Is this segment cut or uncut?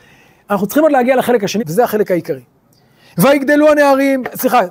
cut